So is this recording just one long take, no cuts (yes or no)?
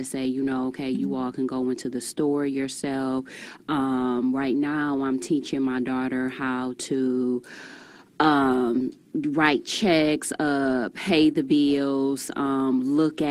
yes